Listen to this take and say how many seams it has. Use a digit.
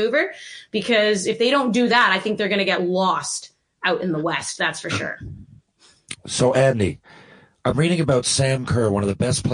0